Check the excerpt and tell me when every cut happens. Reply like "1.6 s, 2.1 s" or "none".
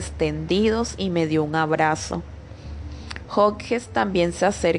3.2 s